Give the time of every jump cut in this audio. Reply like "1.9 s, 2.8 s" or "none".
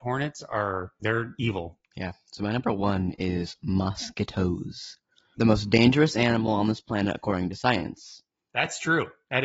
1.4 s, 5.3 s